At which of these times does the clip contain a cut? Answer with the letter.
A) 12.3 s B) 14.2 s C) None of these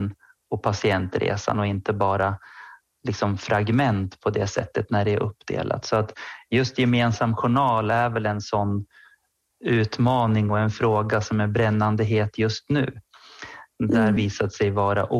B